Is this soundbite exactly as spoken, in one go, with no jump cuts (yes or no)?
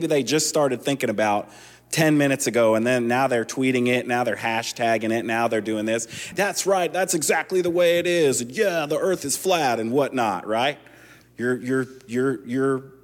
no